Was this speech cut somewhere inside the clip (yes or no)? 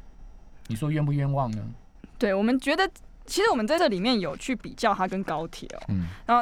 yes